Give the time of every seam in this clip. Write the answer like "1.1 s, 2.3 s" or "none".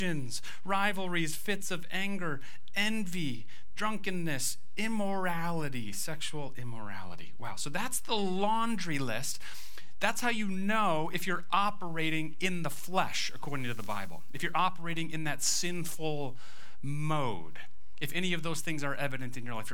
none